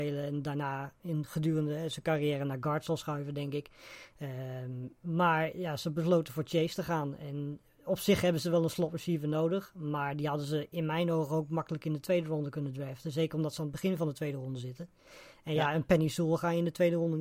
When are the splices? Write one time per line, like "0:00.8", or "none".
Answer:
none

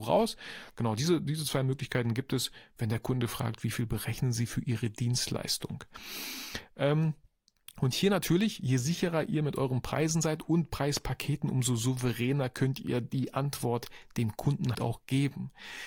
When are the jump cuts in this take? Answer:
0:14.7

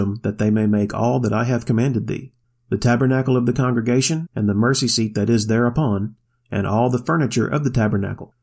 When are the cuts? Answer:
0:04.3

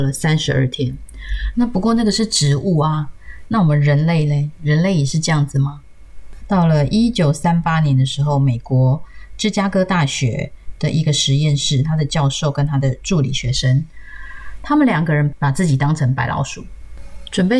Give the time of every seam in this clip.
0:01.5
0:06.4

